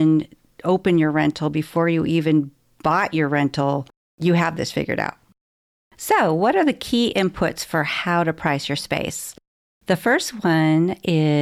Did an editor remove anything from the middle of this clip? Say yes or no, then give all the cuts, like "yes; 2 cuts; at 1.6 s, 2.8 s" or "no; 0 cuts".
no; 0 cuts